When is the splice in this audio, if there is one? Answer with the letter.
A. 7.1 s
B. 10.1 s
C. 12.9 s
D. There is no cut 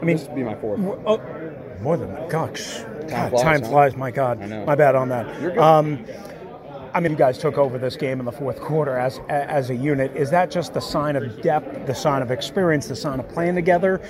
A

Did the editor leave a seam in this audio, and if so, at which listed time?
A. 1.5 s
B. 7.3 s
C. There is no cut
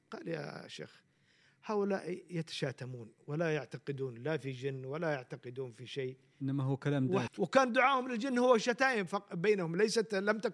B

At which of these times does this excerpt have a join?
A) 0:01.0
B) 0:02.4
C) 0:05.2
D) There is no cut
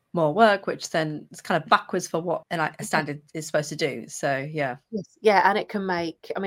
B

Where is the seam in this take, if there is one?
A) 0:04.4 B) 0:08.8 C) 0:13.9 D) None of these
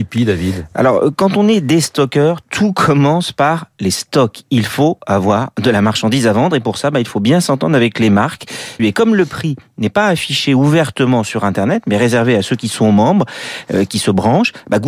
B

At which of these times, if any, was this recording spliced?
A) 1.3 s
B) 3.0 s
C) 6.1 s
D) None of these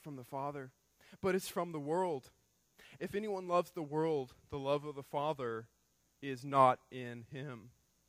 B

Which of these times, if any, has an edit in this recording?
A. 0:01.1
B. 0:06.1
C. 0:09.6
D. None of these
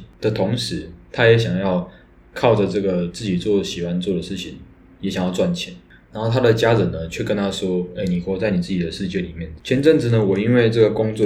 C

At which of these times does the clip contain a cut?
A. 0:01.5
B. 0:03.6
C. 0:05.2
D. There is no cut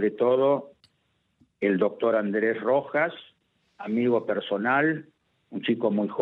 D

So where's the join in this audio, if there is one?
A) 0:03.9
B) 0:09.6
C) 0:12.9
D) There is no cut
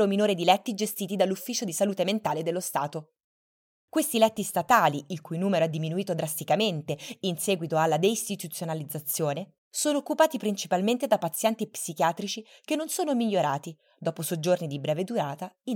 B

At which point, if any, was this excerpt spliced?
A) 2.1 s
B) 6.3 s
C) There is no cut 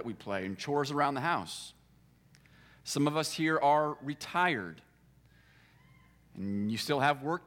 C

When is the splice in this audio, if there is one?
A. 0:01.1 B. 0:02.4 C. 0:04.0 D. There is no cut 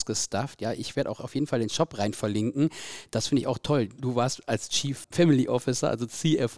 C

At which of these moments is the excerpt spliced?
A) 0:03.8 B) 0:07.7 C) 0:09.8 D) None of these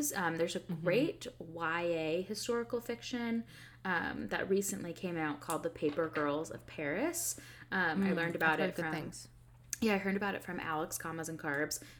D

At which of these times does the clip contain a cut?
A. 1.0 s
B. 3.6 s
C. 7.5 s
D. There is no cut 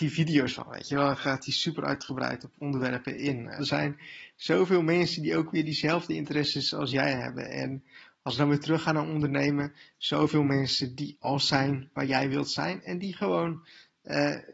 B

